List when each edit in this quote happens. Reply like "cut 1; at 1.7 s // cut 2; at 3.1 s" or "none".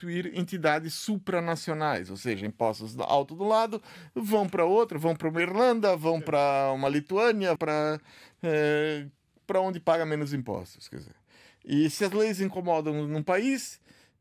cut 1; at 7.6 s